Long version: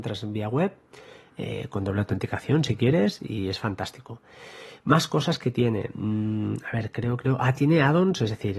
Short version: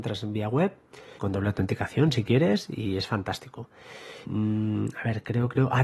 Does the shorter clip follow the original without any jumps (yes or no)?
no